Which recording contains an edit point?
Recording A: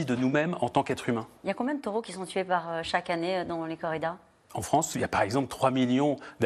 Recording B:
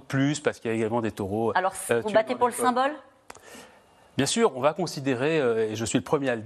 A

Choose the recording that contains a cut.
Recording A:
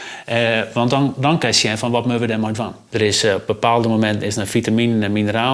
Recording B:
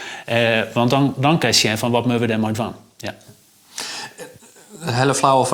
A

